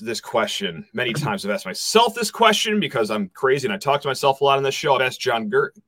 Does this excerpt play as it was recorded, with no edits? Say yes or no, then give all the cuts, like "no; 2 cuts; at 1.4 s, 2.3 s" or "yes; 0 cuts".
yes; 0 cuts